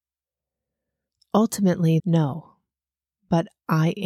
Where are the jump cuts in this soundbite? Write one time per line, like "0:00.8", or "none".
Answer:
0:02.0